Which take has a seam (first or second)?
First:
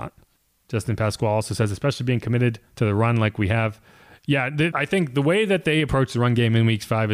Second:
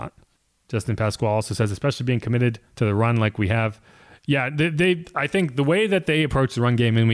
first